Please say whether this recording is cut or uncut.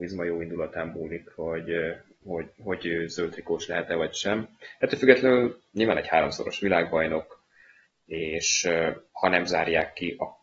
uncut